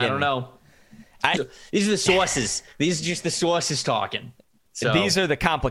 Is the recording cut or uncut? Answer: cut